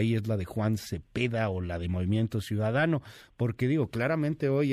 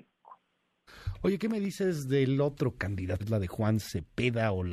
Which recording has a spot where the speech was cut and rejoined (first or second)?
second